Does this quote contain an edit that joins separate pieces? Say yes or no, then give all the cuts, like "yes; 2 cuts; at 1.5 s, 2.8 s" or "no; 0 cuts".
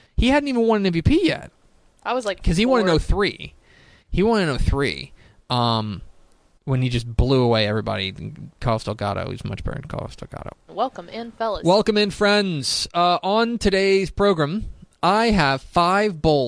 yes; 1 cut; at 10.7 s